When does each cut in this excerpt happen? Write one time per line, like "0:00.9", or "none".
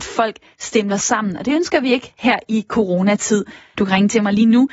0:03.8